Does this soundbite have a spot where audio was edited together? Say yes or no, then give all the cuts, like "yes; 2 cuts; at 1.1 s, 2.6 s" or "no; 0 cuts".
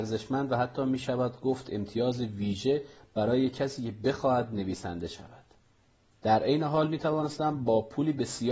yes; 1 cut; at 6.1 s